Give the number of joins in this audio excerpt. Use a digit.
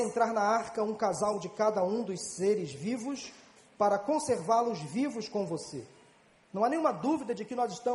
2